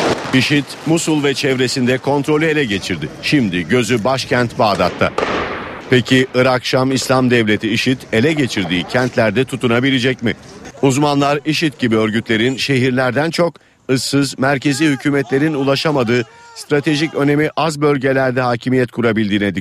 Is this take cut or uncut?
cut